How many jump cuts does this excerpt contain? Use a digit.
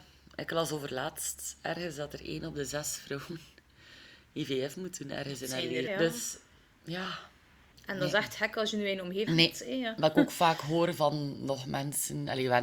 3